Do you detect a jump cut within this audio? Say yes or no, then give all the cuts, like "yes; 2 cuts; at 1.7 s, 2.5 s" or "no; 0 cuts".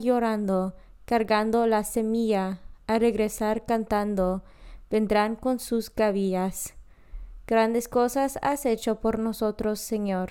no; 0 cuts